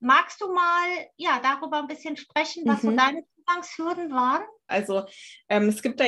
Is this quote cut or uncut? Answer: cut